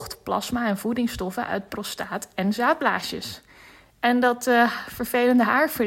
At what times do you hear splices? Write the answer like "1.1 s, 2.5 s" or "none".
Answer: none